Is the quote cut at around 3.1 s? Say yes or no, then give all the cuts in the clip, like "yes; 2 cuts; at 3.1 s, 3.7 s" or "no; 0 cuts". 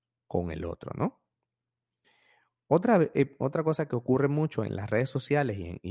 yes; 1 cut; at 3.1 s